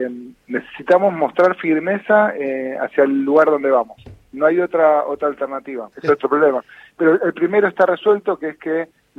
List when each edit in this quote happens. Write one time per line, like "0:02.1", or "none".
0:05.9